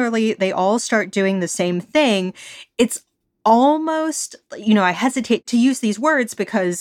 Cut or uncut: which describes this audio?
uncut